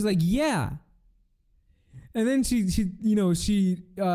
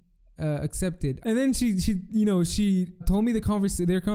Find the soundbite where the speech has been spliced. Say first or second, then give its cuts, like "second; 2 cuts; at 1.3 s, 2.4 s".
second; 2 cuts; at 1.2 s, 3.0 s